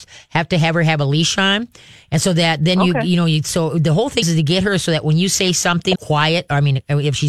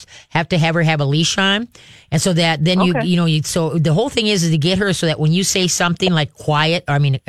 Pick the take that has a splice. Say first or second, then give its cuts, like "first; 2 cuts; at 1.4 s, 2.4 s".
first; 2 cuts; at 4.2 s, 5.9 s